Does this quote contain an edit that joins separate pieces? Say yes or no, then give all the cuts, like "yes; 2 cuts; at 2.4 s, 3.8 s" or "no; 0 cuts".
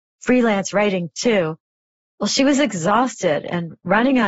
no; 0 cuts